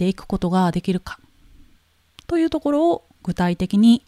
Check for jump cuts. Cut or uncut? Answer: uncut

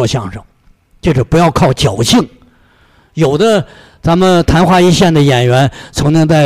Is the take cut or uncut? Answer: uncut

